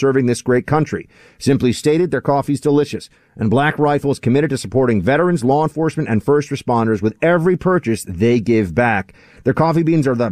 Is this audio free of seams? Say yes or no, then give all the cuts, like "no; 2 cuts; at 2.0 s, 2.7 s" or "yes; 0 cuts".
yes; 0 cuts